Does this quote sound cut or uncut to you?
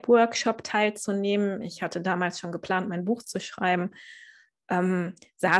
uncut